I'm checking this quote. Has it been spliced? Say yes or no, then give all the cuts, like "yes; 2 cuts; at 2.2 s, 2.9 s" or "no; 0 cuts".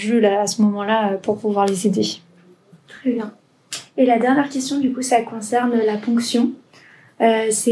no; 0 cuts